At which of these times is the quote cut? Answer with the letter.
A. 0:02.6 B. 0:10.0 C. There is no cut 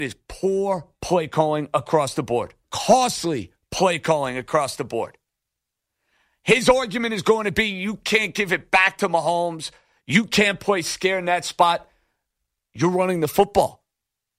A